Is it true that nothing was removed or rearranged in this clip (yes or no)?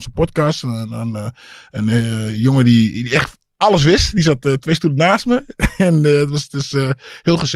yes